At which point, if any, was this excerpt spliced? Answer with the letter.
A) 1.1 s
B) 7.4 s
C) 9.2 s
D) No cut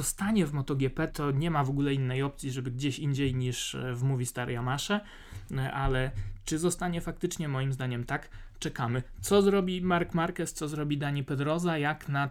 A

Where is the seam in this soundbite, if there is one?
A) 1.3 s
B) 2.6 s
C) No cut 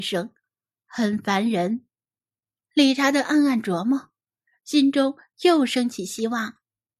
B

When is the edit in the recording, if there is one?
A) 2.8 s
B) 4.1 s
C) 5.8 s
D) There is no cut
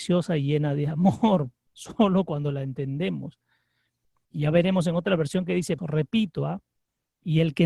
C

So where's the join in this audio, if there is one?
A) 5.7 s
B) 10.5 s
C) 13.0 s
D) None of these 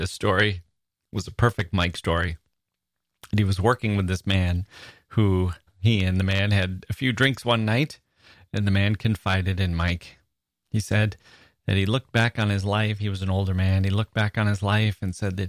A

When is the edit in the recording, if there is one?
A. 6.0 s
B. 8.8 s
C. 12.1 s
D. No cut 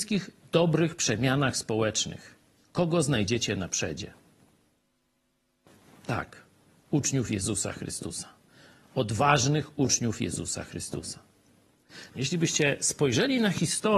C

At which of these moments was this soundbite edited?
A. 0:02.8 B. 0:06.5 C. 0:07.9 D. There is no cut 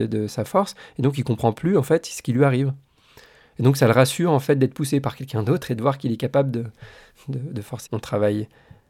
C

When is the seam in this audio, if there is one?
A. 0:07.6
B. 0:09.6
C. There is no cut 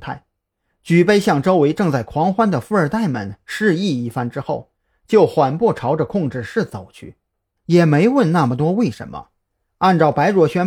A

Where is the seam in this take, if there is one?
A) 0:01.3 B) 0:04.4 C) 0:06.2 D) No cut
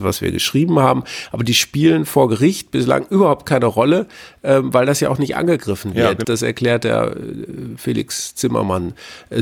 C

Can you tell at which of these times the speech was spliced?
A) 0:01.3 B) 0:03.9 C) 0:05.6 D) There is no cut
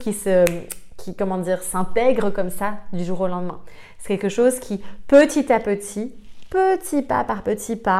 D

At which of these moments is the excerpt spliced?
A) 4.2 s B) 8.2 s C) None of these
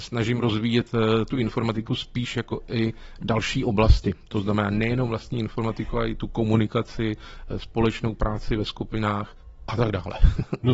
B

